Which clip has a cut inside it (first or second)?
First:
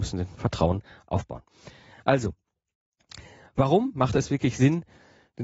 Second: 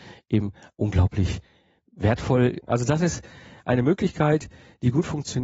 second